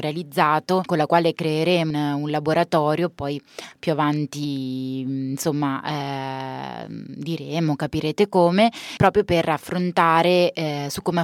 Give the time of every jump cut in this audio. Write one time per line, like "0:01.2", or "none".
0:01.9